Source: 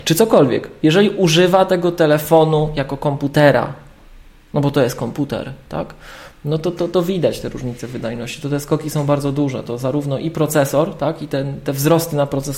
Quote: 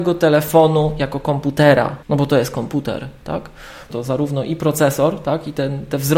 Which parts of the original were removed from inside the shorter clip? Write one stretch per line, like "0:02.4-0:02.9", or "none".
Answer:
0:03.8-0:04.5
0:06.3-0:09.6